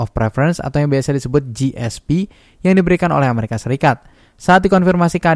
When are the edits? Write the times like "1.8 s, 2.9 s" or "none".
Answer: none